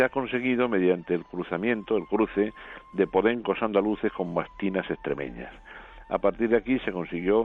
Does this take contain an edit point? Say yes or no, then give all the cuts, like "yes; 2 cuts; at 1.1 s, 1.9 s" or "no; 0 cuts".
no; 0 cuts